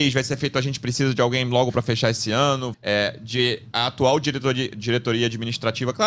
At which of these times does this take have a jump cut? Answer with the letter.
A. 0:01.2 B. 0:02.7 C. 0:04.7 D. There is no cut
B